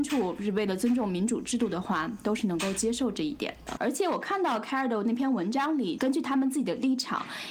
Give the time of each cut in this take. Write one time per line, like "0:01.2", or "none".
0:03.8
0:06.0